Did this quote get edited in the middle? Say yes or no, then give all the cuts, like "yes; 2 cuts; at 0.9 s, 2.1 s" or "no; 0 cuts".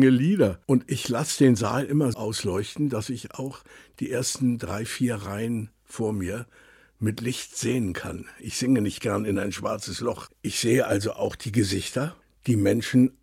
yes; 1 cut; at 2.1 s